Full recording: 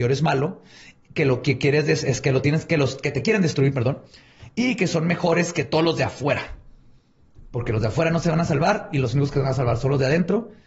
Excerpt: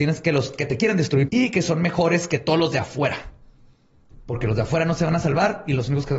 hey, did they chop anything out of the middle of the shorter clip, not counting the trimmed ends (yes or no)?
yes